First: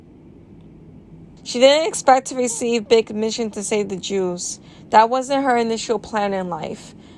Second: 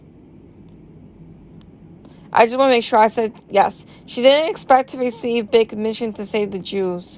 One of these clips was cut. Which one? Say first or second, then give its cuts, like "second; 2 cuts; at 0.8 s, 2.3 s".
first; 1 cut; at 1.4 s